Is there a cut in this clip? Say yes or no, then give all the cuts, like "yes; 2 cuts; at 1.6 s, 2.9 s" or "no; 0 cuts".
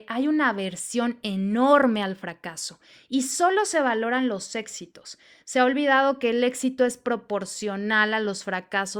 no; 0 cuts